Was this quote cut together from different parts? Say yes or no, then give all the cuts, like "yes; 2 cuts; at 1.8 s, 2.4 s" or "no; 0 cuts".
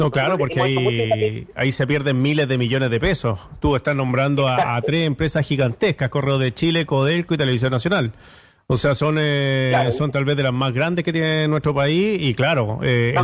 no; 0 cuts